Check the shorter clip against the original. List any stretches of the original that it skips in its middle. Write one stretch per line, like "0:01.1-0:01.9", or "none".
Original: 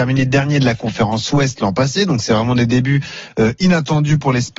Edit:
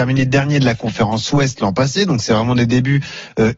none